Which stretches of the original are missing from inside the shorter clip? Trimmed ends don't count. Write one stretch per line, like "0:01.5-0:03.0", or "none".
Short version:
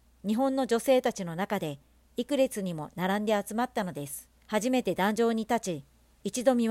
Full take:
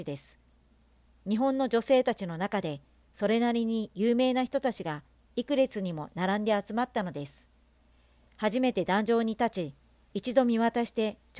0:03.0-0:05.2
0:07.6-0:08.3

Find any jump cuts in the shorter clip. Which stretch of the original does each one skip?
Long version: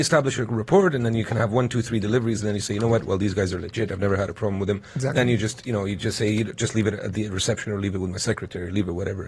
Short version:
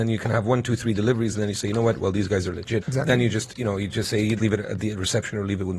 0:03.9-0:04.9
0:06.5-0:06.7

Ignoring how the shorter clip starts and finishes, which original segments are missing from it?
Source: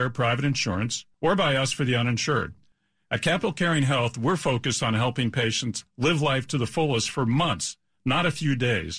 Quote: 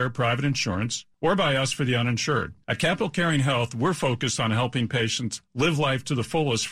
0:02.6-0:03.0

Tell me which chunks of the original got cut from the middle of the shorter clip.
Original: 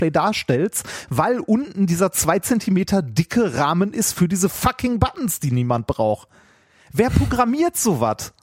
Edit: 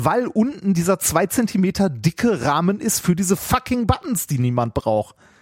none

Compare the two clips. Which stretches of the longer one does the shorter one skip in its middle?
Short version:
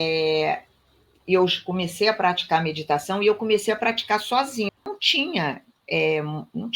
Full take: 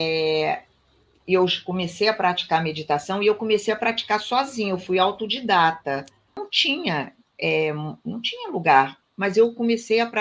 0:04.7-0:06.2

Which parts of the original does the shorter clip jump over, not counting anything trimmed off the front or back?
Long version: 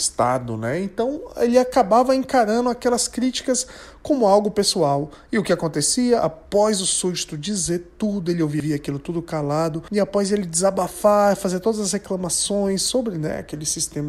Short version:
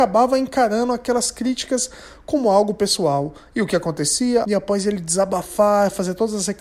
0:06.2-0:09.9

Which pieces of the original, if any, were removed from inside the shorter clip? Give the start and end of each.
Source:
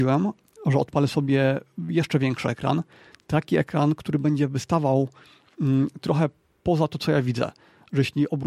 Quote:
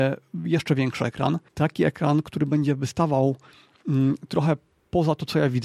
0:02.9-0:03.2

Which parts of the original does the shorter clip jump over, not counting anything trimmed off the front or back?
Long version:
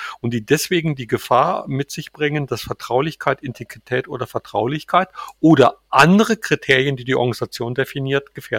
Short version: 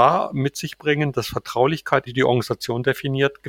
0:03.4-0:07.0

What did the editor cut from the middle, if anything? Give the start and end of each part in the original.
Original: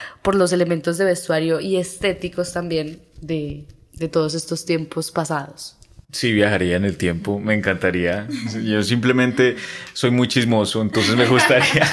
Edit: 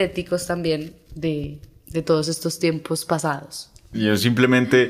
0:06.0-0:08.6

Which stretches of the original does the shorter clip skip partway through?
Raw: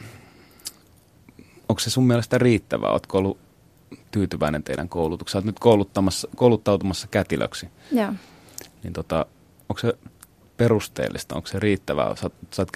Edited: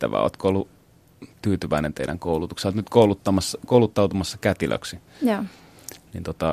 none

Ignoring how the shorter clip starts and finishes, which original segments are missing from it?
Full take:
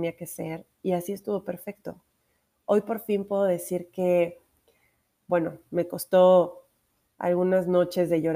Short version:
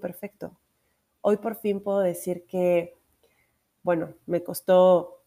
none

